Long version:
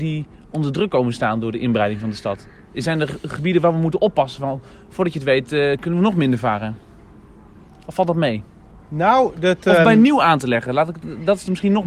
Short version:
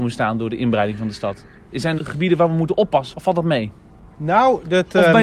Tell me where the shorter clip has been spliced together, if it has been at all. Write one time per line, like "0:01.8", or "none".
0:02.0
0:03.1